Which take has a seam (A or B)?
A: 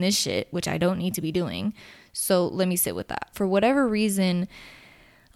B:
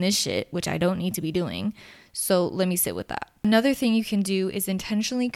A